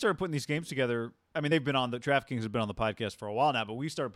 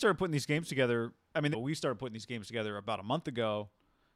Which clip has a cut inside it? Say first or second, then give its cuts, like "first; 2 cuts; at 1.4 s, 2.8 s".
second; 1 cut; at 1.5 s